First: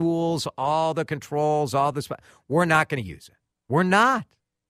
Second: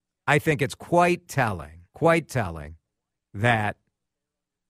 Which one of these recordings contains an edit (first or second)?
second